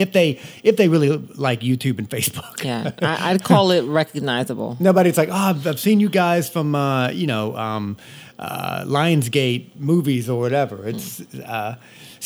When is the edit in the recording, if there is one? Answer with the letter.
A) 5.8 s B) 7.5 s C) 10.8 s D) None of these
D